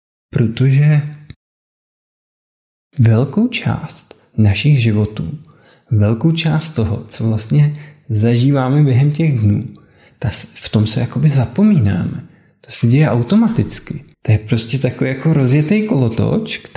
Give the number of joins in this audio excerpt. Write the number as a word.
two